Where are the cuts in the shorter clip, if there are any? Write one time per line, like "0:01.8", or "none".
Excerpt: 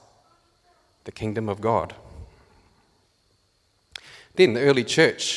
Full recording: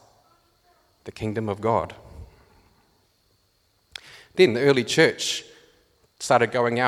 none